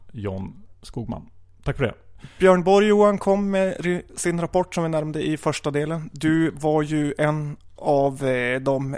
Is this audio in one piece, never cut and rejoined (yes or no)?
yes